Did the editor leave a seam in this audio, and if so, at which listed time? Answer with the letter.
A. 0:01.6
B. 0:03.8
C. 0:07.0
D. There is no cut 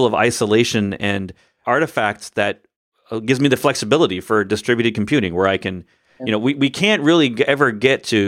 A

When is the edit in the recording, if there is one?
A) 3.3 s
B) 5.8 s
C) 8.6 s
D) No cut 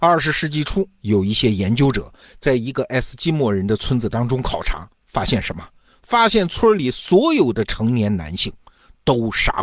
D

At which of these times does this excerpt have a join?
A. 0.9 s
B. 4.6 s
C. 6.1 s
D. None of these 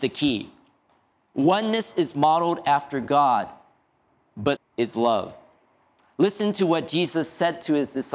B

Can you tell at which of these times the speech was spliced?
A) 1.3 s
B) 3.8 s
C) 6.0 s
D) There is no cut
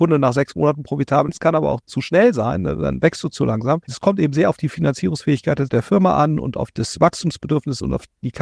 A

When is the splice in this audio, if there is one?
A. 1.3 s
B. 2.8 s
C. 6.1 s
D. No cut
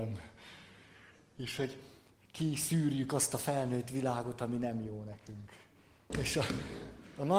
C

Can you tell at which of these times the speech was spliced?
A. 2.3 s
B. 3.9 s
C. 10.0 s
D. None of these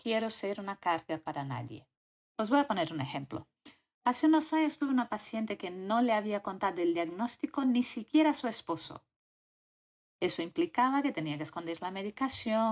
A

